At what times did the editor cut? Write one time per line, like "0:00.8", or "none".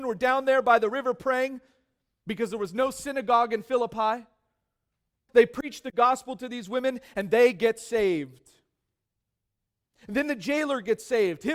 0:05.3